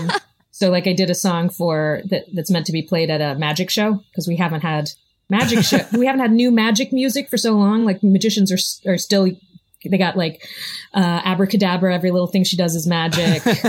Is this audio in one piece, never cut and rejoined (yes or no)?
yes